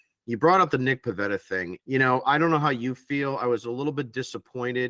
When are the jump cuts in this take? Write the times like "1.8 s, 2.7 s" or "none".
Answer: 1.8 s